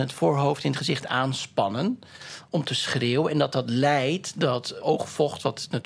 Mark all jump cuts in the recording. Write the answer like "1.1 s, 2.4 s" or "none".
4.8 s